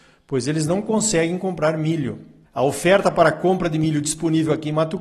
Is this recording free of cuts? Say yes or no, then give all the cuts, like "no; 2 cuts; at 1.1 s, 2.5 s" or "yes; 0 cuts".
no; 1 cut; at 2.4 s